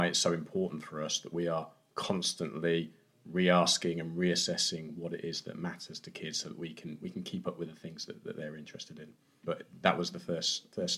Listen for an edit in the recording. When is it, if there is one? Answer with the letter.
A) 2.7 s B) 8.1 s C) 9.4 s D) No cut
C